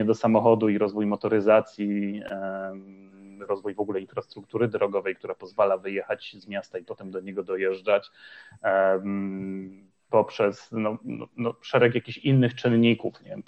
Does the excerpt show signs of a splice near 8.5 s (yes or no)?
no